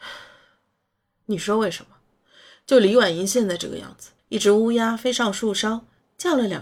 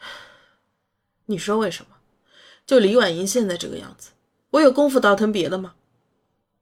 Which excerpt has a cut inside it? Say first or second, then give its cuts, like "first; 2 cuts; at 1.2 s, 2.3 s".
first; 1 cut; at 4.2 s